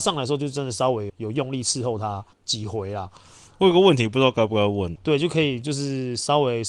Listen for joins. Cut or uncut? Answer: cut